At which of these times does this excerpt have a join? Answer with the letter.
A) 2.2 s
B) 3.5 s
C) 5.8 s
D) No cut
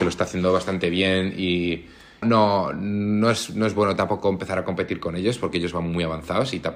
A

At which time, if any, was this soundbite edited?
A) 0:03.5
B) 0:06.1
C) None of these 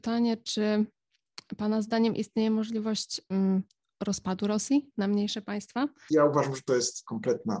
B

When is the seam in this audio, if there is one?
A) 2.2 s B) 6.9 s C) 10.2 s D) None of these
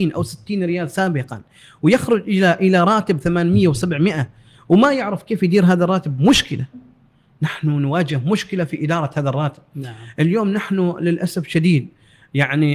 D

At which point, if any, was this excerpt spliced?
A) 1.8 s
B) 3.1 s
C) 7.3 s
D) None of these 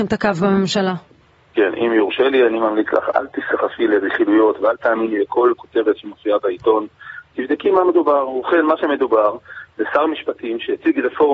B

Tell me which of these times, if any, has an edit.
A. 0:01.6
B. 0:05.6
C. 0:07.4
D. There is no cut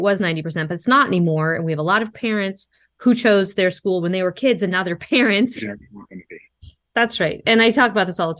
B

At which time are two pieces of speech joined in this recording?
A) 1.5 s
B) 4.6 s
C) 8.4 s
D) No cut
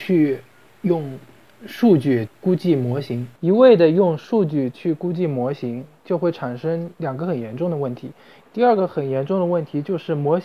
C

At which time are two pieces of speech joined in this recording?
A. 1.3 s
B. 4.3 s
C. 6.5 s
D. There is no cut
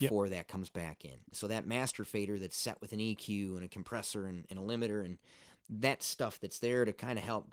A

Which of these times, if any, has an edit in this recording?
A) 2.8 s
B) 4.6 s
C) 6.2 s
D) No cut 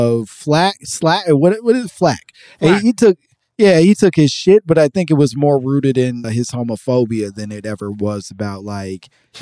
C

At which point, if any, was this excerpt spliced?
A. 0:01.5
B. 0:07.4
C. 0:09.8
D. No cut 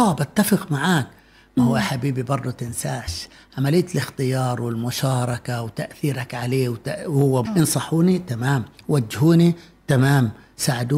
B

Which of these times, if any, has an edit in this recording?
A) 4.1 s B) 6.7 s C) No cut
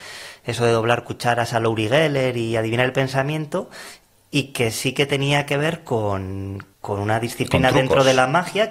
B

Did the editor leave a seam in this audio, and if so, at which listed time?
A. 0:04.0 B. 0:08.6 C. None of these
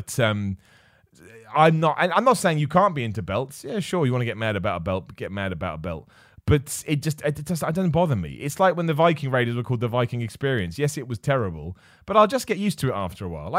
C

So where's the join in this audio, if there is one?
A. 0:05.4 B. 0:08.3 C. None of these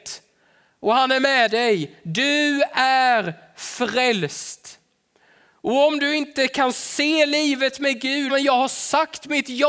B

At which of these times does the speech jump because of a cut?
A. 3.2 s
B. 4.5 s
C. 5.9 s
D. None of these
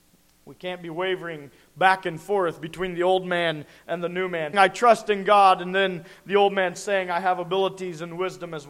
B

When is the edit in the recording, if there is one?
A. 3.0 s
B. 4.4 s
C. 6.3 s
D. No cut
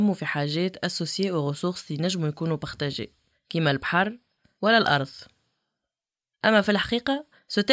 B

